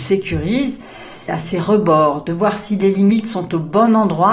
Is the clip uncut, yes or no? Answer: no